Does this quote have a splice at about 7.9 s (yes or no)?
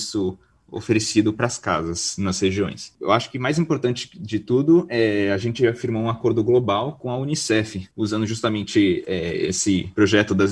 no